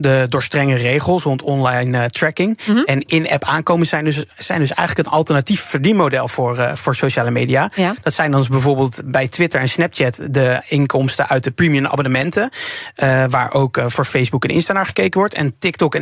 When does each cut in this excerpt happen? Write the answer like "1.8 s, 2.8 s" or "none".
none